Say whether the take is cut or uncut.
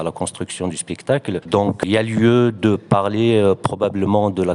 cut